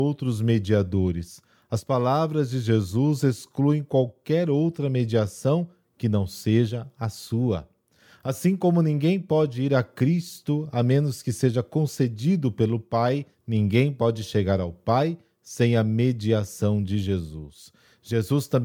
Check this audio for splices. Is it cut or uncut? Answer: cut